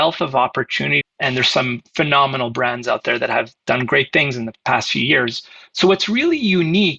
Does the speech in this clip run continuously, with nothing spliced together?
no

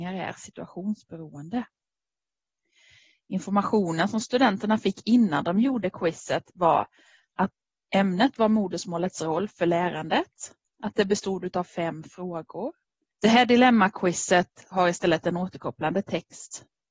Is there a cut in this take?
yes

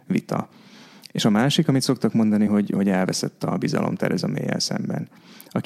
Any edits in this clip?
no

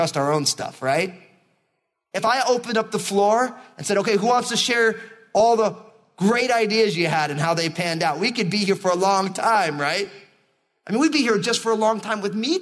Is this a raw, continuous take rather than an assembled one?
yes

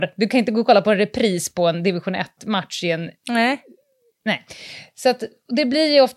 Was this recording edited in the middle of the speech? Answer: no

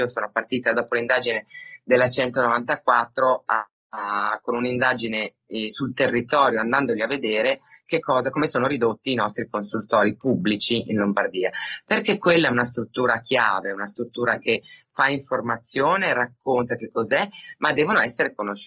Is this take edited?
no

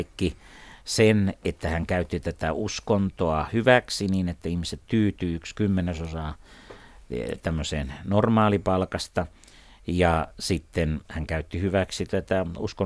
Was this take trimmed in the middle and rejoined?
no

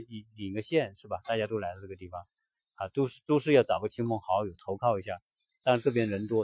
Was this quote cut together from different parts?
no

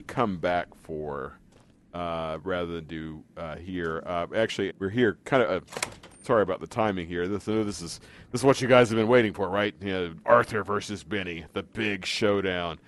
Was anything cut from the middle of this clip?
yes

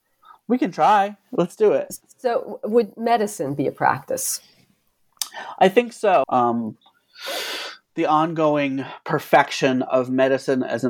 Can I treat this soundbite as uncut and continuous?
no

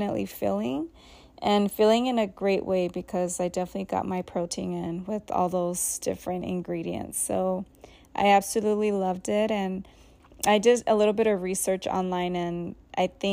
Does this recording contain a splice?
no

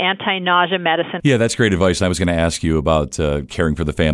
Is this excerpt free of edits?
no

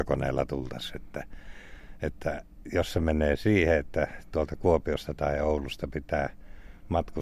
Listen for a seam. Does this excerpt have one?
no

